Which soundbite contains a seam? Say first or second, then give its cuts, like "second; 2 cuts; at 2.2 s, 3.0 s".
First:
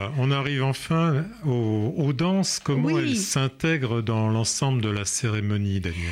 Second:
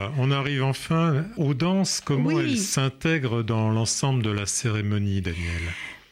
second; 1 cut; at 1.4 s